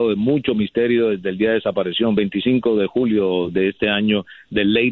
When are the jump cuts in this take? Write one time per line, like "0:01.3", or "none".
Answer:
none